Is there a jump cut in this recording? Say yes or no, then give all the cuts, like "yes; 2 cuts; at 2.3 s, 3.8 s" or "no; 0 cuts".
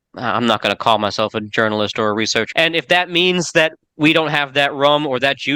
yes; 2 cuts; at 2.5 s, 3.8 s